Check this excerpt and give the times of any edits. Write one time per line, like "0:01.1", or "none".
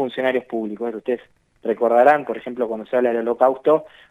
0:00.9